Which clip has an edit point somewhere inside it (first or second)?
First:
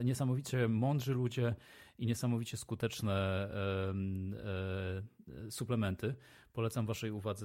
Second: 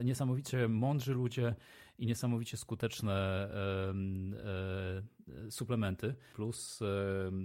second